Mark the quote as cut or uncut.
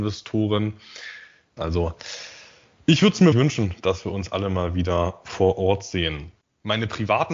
cut